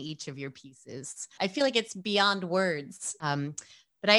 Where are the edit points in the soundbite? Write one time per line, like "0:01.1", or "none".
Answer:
0:01.4
0:03.2